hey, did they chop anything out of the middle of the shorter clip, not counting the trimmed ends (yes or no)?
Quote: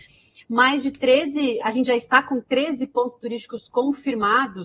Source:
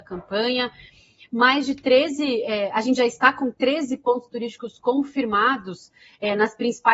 yes